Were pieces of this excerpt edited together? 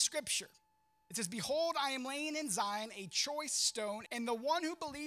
yes; 1 cut; at 4.1 s

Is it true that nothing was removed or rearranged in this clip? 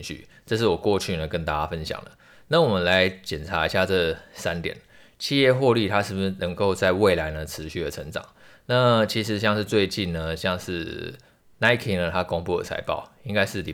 yes; 0 cuts

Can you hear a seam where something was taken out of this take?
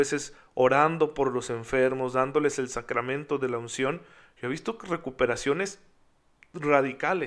no; 0 cuts

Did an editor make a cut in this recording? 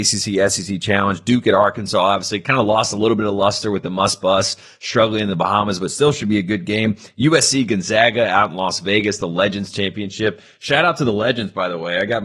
no; 0 cuts

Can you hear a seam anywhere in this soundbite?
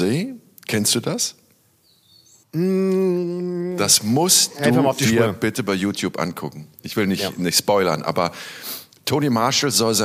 no; 0 cuts

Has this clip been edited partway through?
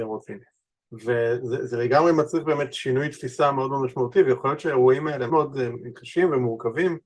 yes; 1 cut; at 5.3 s

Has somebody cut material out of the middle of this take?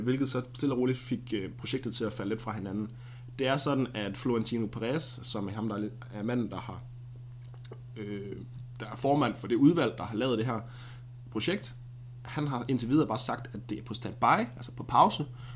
no; 0 cuts

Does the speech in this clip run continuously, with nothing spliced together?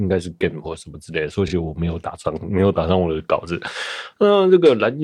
yes; 0 cuts

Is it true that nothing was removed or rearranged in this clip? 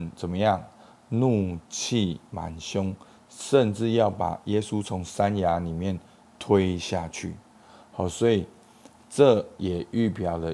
yes; 0 cuts

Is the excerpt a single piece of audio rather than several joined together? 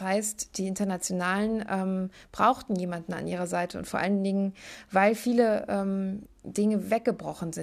no; 1 cut; at 6.2 s

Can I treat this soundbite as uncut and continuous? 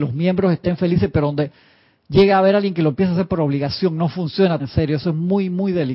no; 1 cut; at 4.6 s

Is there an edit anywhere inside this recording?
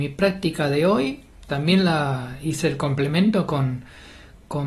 no; 0 cuts

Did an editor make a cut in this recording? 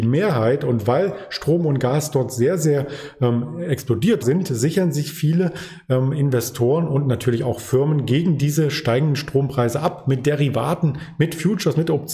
yes; 1 cut; at 4.2 s

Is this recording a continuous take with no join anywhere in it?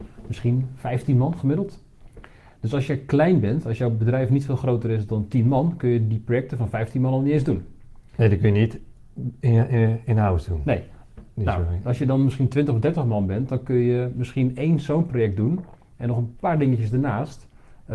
yes; 0 cuts

